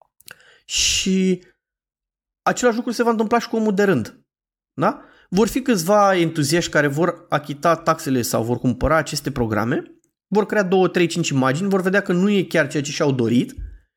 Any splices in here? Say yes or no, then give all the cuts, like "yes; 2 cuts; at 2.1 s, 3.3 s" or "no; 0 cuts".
no; 0 cuts